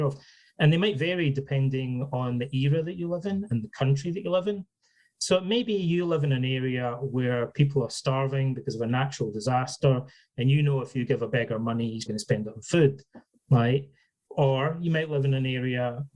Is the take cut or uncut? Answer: cut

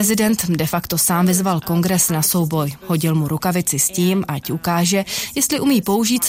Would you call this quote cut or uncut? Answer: uncut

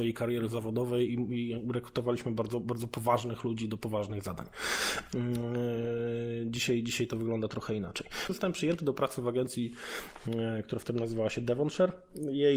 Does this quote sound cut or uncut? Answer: cut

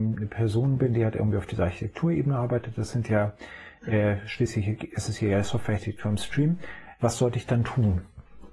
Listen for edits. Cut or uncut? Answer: cut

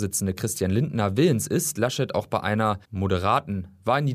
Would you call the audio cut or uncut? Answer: cut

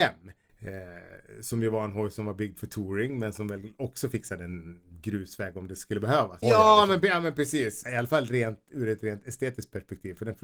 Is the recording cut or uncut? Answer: cut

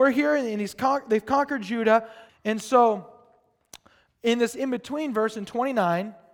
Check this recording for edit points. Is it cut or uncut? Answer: cut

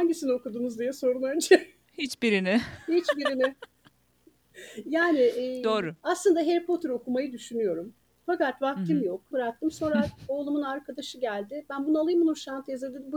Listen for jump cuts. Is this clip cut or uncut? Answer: cut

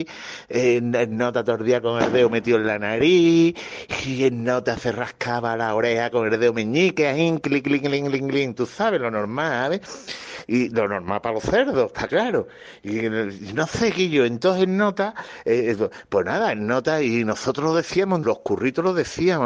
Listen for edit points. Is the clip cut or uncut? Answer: cut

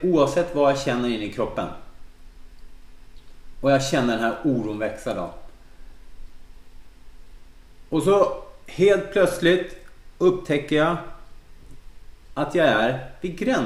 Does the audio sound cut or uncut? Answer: uncut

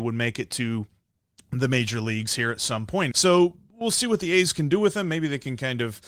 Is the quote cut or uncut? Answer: cut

